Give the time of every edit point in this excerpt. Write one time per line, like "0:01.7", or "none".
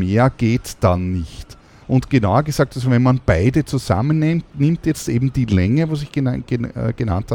0:01.8